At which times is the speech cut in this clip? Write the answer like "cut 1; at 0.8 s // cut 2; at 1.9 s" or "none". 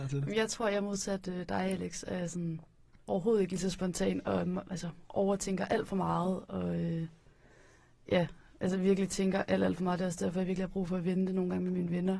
none